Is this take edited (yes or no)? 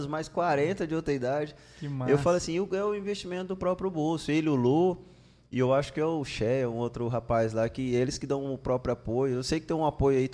no